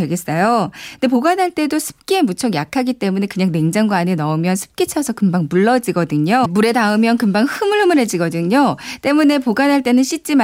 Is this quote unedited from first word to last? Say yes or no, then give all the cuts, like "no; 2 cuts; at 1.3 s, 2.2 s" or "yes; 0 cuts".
no; 1 cut; at 6.5 s